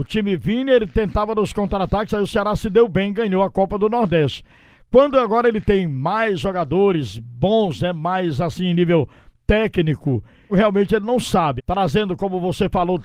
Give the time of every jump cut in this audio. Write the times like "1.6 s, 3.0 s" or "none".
10.5 s, 11.6 s